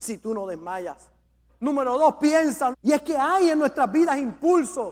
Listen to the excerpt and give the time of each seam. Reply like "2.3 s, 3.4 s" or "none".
1.5 s, 2.7 s